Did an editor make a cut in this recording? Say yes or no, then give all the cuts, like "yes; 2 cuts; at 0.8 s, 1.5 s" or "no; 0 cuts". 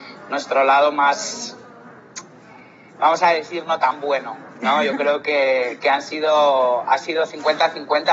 no; 0 cuts